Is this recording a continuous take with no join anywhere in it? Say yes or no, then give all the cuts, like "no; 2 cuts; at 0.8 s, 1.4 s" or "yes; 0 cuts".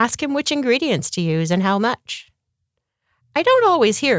no; 1 cut; at 3.2 s